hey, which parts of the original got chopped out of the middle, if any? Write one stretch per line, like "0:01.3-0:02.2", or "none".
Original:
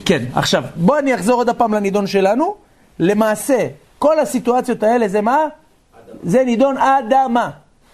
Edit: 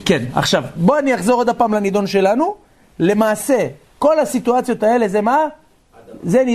none